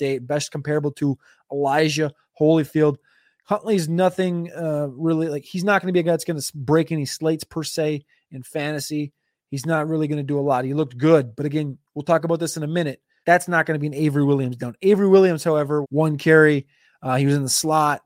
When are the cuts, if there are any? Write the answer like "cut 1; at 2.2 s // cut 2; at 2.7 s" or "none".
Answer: cut 1; at 13.2 s // cut 2; at 15.8 s